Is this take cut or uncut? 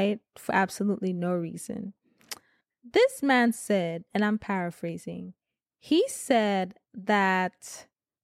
uncut